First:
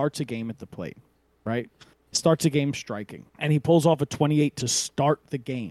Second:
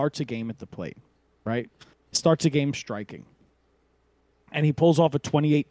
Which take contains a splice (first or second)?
first